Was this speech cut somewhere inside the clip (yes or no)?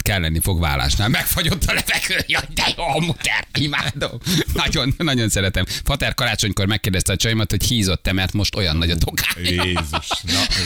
yes